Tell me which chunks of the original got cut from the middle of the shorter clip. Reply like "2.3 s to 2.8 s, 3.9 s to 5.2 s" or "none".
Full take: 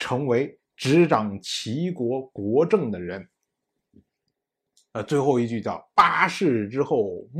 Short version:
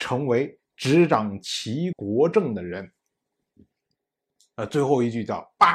1.9 s to 2.3 s